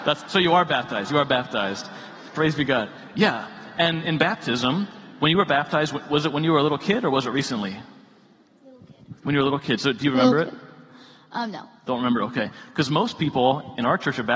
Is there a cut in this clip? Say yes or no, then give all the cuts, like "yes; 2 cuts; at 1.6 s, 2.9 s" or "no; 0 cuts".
no; 0 cuts